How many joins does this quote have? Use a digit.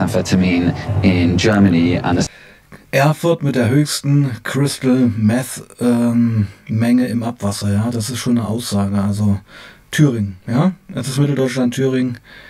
0